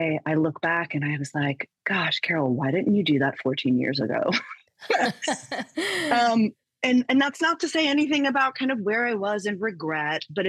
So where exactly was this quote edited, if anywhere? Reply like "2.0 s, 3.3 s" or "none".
none